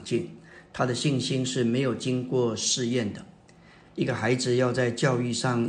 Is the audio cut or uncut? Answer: uncut